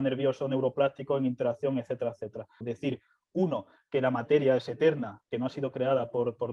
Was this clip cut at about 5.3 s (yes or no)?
yes